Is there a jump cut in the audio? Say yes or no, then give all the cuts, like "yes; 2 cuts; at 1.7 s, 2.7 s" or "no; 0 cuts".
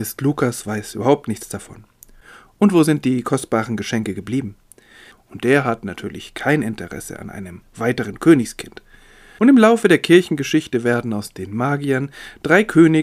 yes; 2 cuts; at 5.1 s, 9.4 s